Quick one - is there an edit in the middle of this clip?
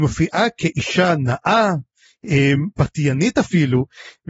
no; 0 cuts

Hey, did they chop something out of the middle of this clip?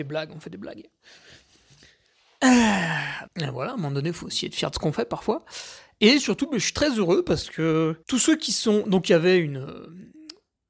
yes; 2 cuts; at 3.3 s, 8.0 s

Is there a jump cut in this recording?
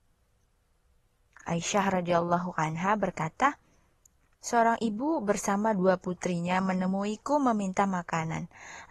no; 0 cuts

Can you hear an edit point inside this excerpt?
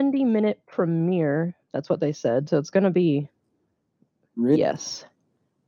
no; 0 cuts

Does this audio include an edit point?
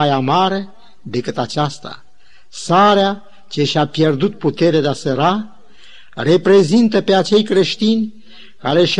no; 0 cuts

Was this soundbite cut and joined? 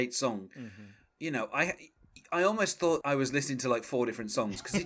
yes; 1 cut; at 3.0 s

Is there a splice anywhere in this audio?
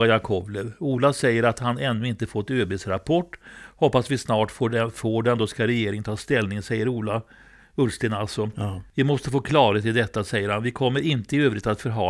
no; 0 cuts

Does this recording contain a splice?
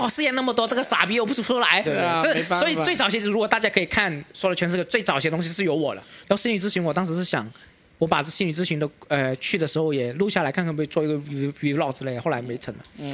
yes; 2 cuts; at 1.8 s, 6.2 s

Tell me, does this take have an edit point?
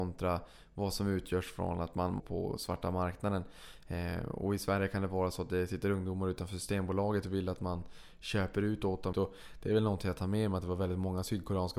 yes; 2 cuts; at 2.2 s, 9.1 s

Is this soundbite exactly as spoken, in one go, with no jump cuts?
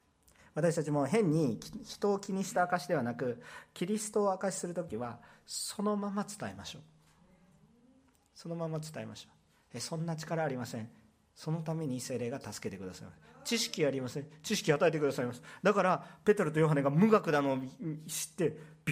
yes; 0 cuts

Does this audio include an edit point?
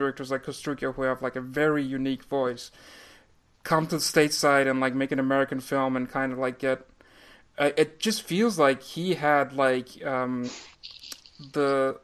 no; 0 cuts

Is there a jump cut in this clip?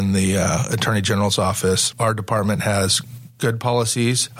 yes; 1 cut; at 1.9 s

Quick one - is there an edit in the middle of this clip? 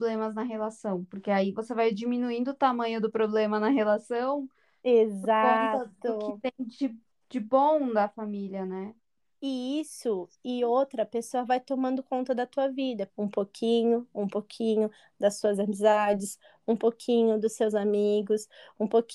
yes; 1 cut; at 13.1 s

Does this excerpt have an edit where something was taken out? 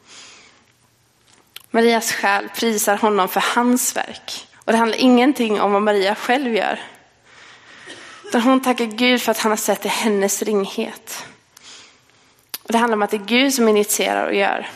yes; 2 cuts; at 1.6 s, 4.5 s

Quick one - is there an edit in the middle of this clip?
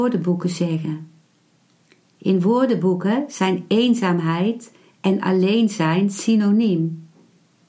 no; 0 cuts

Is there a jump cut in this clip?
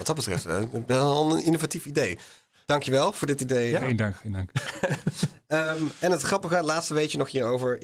no; 0 cuts

